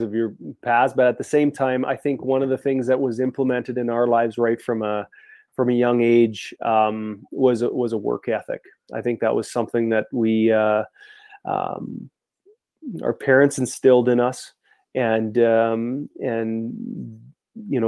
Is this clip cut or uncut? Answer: uncut